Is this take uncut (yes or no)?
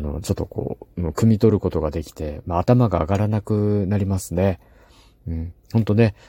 yes